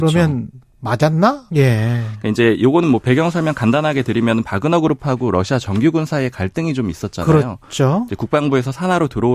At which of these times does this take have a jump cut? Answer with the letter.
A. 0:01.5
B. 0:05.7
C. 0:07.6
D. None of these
A